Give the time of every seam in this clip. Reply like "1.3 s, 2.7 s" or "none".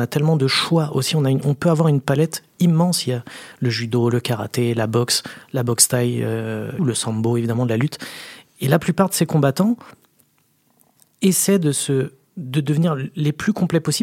6.8 s